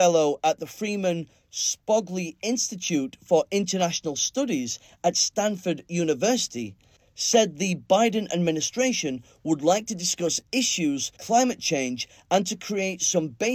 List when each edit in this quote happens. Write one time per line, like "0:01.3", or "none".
0:11.2